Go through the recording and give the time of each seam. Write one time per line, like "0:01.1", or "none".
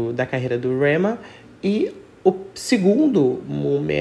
none

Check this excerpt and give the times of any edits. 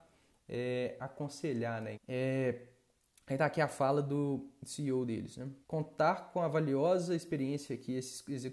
0:01.9
0:05.6

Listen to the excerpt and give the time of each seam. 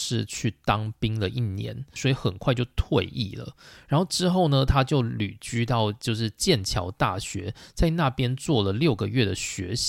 0:02.0

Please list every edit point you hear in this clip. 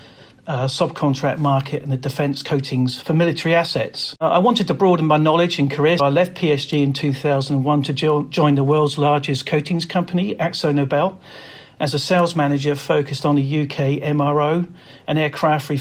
0:06.0

